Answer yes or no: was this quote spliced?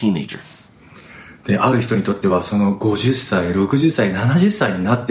no